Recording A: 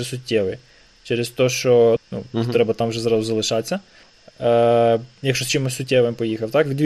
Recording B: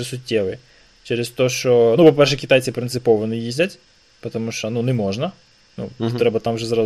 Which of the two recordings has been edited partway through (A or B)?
A